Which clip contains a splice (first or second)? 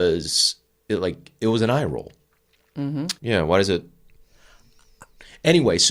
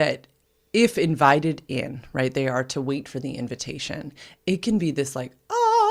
first